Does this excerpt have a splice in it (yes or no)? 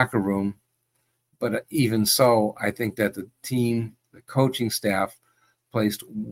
no